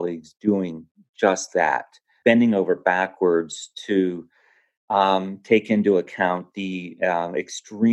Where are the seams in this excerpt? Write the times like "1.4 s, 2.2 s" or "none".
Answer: 2.2 s